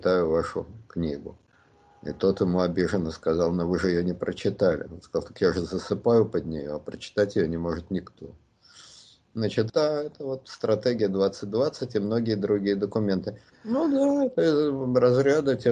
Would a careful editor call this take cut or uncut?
cut